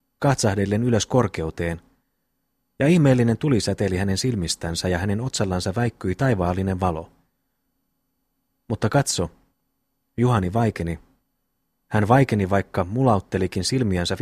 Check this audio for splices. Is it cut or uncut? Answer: uncut